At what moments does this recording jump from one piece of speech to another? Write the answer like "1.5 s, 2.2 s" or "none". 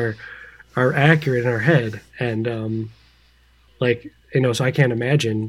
4.2 s